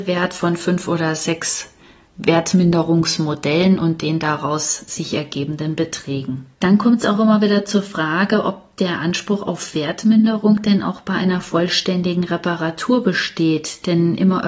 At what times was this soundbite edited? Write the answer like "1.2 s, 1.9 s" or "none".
6.5 s